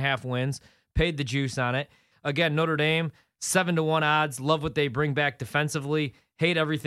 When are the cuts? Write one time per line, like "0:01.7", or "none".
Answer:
0:02.1